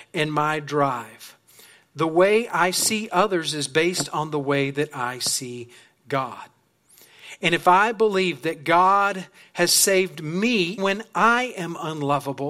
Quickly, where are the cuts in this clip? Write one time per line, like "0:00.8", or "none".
0:10.8